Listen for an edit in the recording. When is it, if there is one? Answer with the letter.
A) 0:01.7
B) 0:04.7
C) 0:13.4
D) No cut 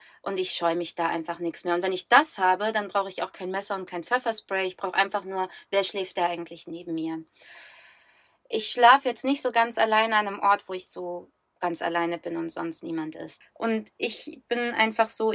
C